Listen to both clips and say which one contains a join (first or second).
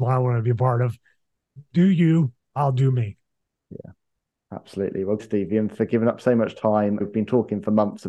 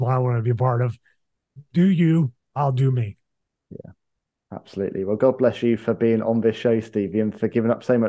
first